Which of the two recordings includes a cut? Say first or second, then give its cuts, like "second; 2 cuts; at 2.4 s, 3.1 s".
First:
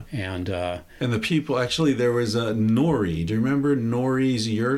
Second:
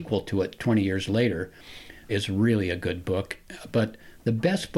second; 1 cut; at 2.1 s